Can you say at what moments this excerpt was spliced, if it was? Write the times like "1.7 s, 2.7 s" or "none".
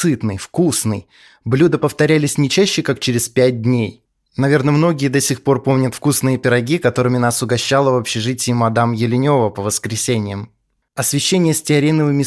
10.8 s

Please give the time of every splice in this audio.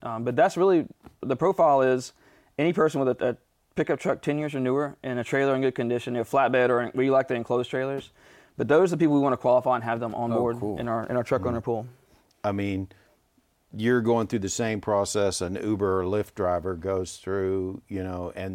12.3 s

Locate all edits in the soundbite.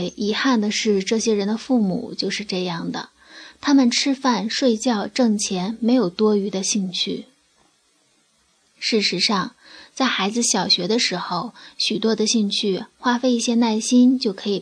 none

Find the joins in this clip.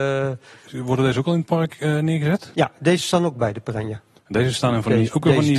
none

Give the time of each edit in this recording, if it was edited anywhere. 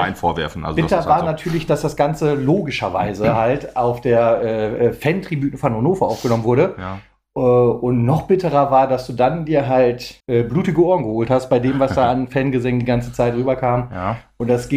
10.2 s

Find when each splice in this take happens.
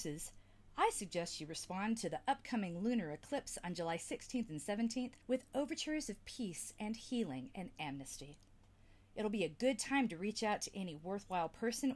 5.2 s

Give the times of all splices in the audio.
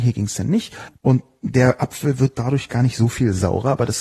0.9 s, 2.7 s

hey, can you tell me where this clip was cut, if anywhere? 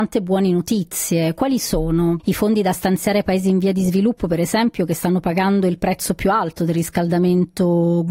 2.2 s

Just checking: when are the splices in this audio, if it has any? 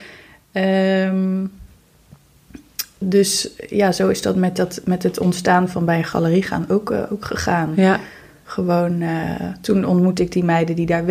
3.0 s

